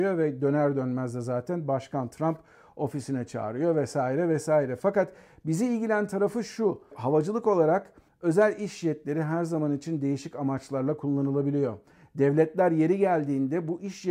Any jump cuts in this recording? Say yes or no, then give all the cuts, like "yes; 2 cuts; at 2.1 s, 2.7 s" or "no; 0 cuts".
no; 0 cuts